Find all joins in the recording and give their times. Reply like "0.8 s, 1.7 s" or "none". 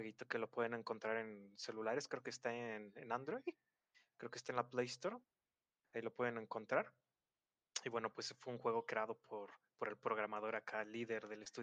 none

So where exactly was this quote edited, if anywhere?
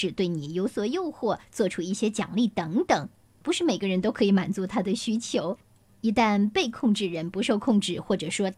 3.4 s

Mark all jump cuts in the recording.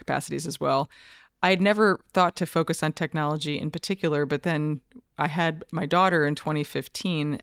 none

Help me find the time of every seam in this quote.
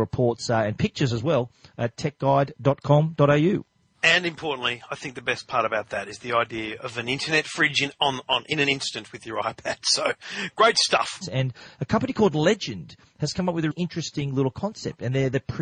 11.2 s, 13.7 s

